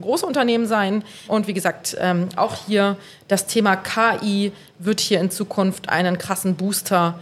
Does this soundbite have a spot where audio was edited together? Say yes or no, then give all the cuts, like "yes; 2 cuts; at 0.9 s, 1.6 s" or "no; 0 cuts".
yes; 1 cut; at 1.3 s